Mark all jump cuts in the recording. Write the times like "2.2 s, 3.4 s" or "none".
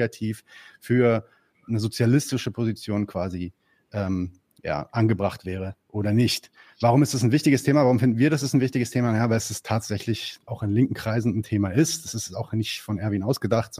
10.5 s